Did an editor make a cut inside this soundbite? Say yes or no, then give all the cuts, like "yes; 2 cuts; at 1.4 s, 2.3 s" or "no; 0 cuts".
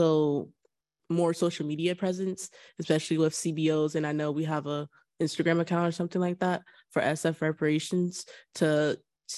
yes; 1 cut; at 1.0 s